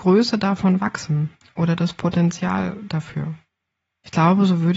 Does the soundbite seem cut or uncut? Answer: uncut